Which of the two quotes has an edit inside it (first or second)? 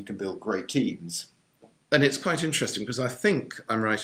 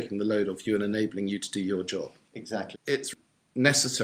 second